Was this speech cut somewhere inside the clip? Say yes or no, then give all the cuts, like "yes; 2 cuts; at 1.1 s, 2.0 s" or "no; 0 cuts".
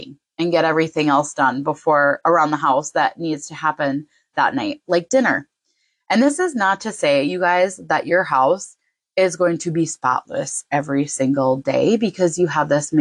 no; 0 cuts